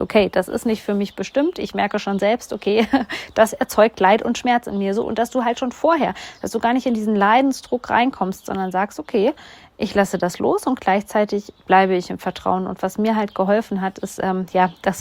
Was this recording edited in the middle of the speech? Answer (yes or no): no